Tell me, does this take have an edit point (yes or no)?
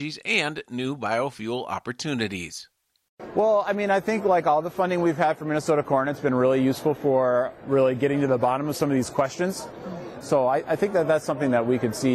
yes